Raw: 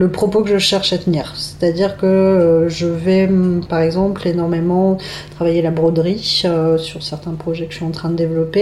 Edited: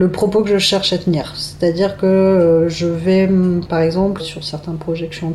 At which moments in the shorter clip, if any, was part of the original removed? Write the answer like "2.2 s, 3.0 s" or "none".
4.2 s